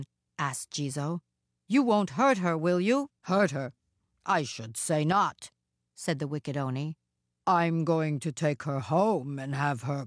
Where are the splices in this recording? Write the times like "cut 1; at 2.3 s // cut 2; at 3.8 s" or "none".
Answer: cut 1; at 3.2 s